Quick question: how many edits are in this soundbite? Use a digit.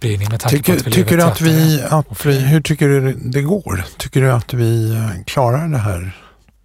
0